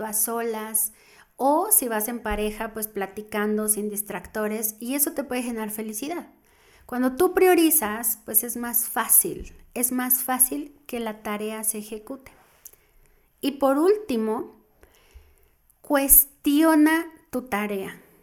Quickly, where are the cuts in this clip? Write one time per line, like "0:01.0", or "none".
none

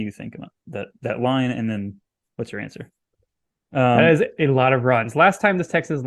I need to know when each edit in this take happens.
0:03.7

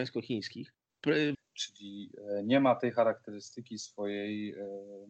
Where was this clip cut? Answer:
0:01.3

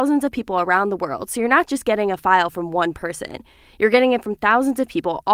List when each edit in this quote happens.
none

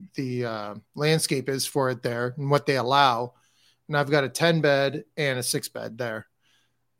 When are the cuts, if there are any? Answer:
none

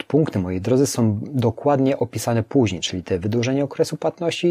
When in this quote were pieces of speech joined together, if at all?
none

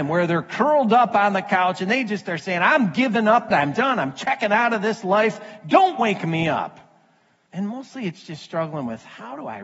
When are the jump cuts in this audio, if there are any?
0:03.5
0:07.5

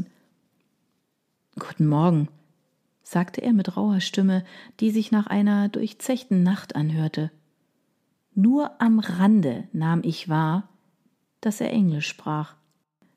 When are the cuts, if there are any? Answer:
none

